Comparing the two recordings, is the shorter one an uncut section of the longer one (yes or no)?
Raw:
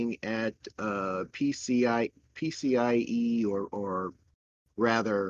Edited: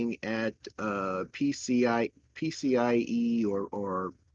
yes